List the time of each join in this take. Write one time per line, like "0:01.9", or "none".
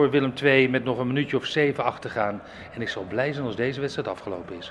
none